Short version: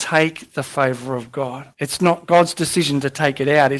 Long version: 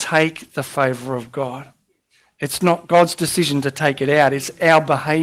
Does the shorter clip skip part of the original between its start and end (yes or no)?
yes